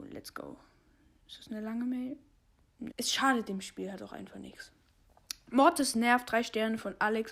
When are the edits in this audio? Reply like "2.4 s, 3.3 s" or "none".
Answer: 2.9 s